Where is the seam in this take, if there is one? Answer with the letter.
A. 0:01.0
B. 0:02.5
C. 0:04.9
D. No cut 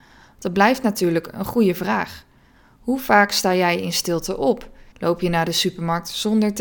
C